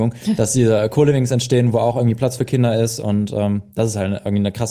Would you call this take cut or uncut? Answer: uncut